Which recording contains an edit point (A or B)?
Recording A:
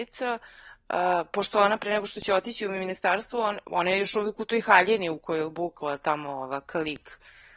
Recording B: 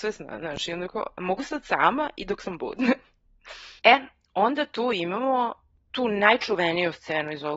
B